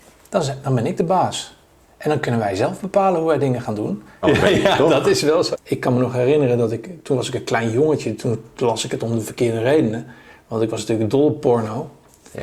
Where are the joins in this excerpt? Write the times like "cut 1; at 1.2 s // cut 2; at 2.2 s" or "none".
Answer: cut 1; at 4.2 s // cut 2; at 5.5 s